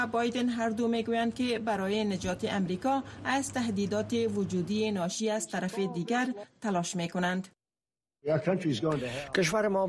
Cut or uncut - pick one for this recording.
uncut